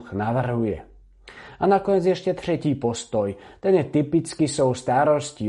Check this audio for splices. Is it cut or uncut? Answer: uncut